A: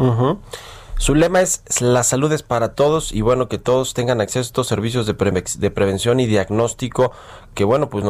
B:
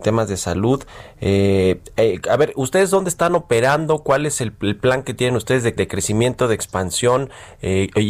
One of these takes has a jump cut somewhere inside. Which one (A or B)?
B